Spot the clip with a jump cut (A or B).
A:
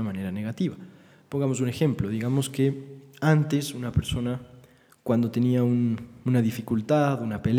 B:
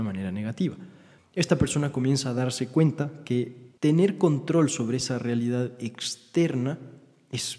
B